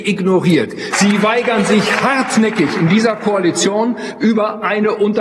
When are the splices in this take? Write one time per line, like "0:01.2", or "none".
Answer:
0:00.9